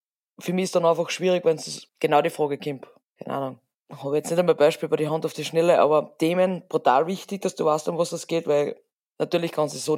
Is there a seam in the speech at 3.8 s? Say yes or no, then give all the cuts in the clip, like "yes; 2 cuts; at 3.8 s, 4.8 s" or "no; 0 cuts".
no; 0 cuts